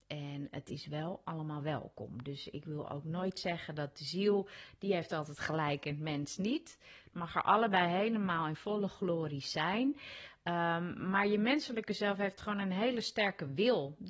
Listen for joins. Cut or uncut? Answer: uncut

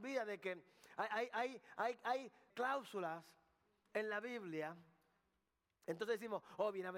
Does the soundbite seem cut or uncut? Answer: cut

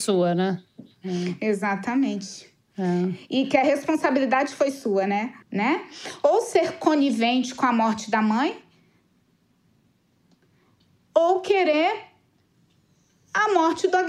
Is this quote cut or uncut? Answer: cut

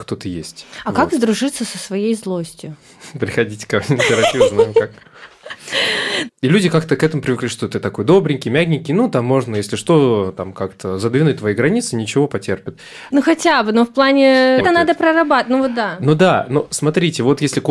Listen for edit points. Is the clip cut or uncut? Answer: cut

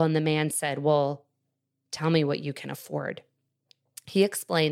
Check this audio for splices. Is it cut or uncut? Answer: uncut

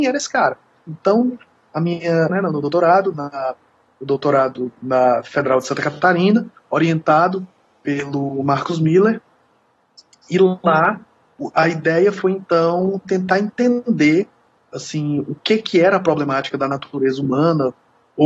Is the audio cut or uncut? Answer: cut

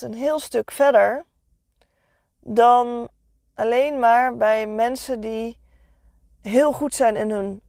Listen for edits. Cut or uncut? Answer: uncut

